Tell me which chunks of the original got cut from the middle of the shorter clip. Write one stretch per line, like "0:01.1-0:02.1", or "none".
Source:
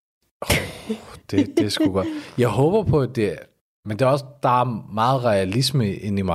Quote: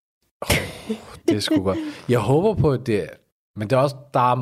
0:01.2-0:01.5